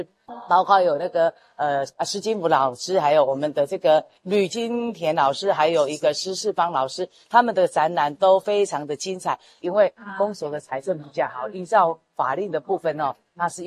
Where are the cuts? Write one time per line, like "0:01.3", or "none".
0:09.6